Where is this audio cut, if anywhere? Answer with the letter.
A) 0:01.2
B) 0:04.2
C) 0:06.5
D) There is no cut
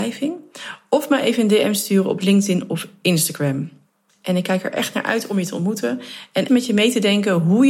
C